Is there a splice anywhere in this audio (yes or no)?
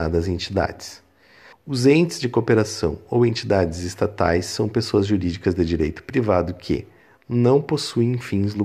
yes